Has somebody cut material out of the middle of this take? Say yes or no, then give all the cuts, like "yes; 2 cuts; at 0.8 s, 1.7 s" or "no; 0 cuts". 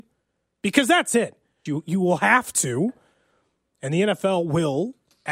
yes; 1 cut; at 1.7 s